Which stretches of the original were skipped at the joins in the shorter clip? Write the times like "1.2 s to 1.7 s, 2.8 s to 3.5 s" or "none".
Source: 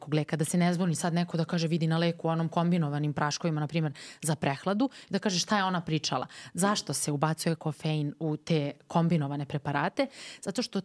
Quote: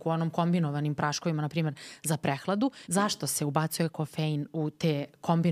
5.0 s to 6.5 s